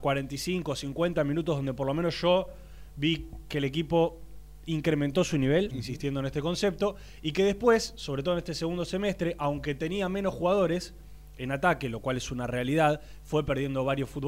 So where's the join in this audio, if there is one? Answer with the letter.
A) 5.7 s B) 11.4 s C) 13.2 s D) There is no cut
A